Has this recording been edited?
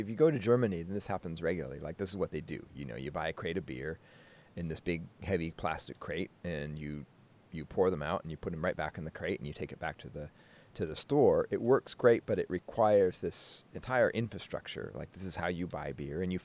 no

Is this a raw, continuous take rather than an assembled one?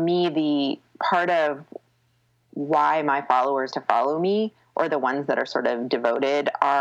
no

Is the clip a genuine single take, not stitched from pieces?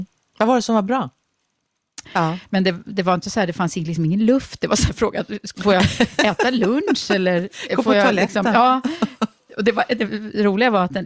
no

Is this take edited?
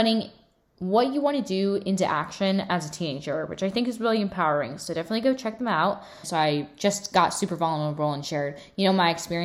yes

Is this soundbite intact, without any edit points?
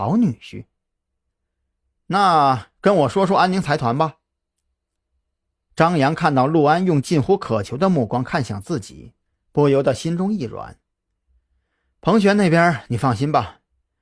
yes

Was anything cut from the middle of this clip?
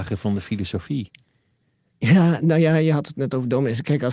no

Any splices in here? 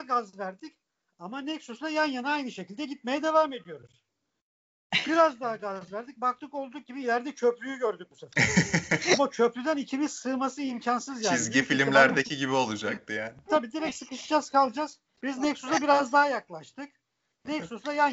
yes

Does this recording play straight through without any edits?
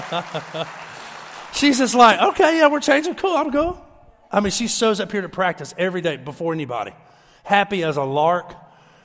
yes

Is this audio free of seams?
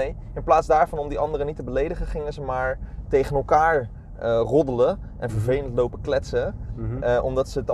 yes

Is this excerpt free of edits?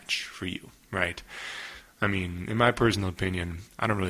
yes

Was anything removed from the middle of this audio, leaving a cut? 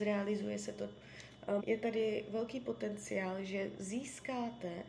yes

